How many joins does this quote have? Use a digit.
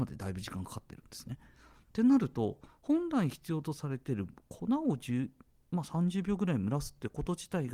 1